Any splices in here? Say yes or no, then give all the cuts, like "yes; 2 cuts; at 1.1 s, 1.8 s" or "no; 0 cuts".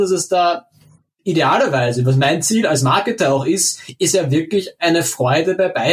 no; 0 cuts